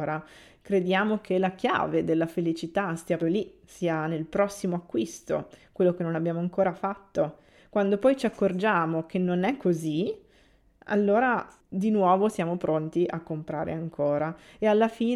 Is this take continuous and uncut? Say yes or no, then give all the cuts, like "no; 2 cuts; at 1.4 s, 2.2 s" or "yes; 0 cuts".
no; 1 cut; at 3.2 s